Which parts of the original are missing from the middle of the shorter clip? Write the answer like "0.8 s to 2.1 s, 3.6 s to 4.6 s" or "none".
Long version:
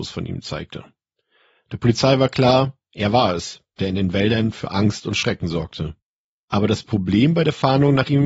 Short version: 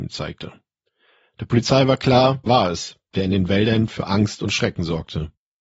2.8 s to 3.1 s